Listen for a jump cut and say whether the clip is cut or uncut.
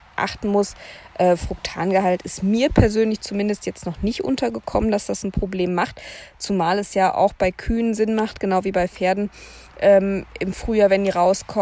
uncut